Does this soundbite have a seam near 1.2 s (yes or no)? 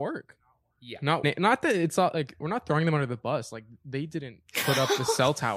yes